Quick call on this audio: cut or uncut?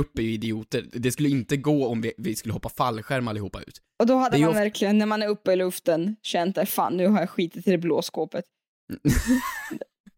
uncut